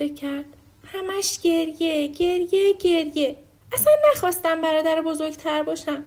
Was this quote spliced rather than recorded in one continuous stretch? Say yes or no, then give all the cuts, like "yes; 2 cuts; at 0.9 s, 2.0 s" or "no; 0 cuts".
no; 0 cuts